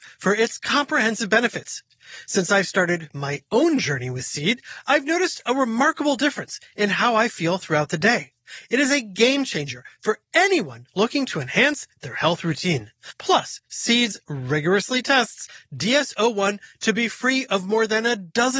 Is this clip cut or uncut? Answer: uncut